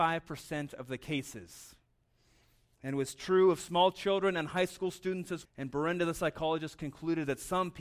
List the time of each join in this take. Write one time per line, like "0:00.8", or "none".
0:05.5